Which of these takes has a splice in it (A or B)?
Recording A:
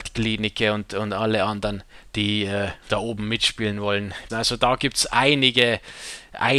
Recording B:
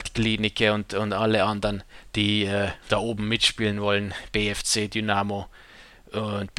A